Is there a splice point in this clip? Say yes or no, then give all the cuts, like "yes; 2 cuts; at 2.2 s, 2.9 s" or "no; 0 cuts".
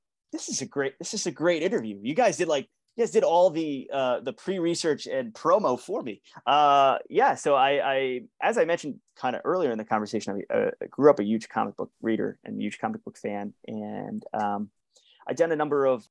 no; 0 cuts